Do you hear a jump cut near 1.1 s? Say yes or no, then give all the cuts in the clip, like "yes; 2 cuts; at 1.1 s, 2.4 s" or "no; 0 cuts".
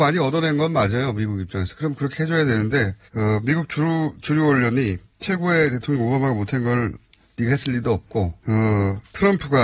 no; 2 cuts; at 3.1 s, 8.4 s